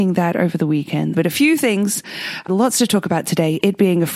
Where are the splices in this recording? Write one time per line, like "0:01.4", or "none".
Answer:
0:01.1
0:02.5